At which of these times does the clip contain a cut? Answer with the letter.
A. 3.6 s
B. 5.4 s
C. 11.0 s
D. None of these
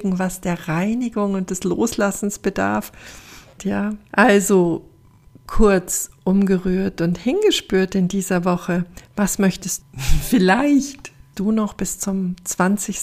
A